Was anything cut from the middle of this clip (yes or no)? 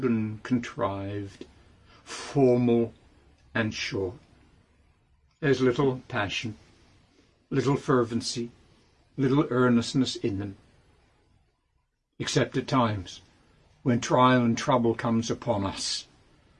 no